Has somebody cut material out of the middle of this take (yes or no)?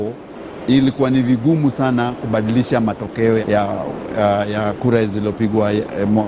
yes